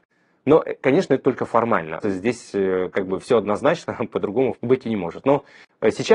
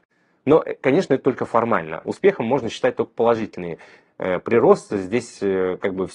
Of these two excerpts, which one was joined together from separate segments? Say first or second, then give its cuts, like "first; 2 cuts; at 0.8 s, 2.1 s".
first; 2 cuts; at 2.0 s, 4.5 s